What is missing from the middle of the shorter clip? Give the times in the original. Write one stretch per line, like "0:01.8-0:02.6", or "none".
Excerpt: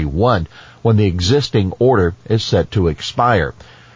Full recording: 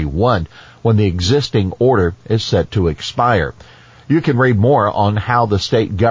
none

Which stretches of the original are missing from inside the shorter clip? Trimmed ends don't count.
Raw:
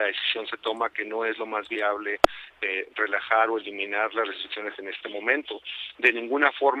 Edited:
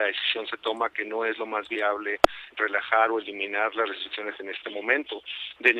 0:02.5-0:02.9

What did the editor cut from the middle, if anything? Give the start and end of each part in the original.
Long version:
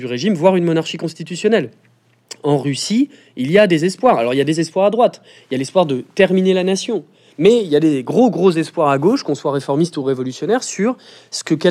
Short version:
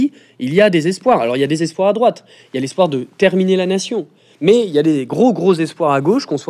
none

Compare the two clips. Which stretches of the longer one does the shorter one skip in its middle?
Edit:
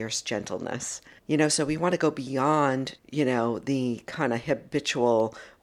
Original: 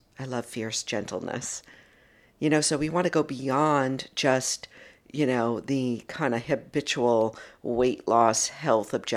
0:01.8-0:02.3
0:04.1-0:05.0

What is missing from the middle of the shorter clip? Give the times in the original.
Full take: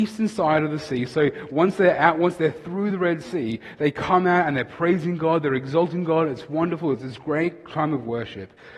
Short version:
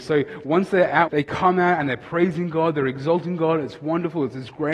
0:02.1-0:03.8

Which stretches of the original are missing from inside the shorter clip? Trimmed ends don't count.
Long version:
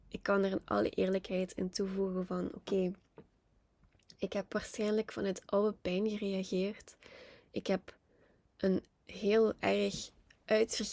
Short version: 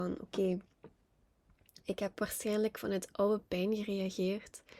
none

